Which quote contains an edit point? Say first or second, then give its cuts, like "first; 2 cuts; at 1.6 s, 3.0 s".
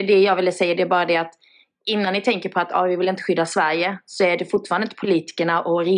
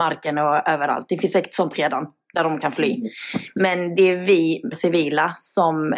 second; 1 cut; at 4.7 s